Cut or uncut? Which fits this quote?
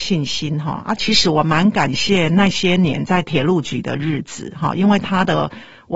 cut